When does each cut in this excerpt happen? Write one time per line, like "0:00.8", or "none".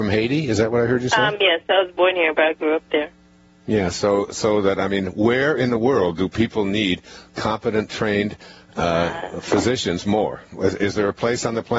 none